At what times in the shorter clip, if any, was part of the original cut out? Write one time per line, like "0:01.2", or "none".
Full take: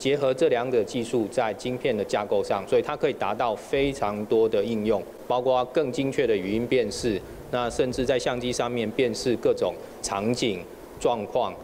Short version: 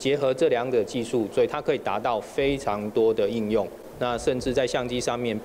0:01.3
0:03.9